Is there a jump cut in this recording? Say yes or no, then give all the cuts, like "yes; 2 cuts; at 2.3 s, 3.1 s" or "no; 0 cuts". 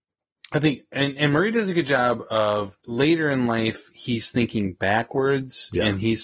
yes; 1 cut; at 2.8 s